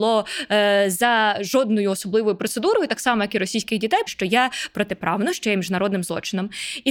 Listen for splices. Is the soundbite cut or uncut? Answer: cut